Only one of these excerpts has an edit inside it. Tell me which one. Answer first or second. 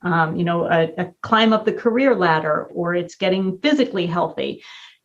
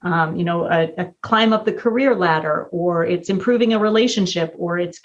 first